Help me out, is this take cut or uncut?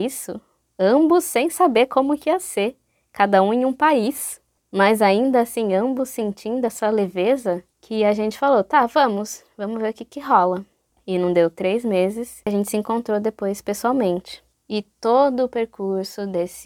uncut